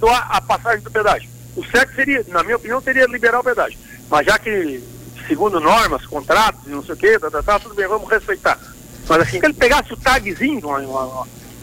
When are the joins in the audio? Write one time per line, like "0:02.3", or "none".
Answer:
0:09.4
0:10.6